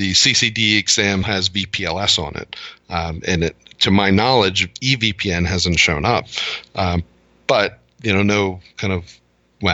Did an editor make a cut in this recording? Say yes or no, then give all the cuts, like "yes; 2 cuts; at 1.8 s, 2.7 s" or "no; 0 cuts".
yes; 1 cut; at 1.2 s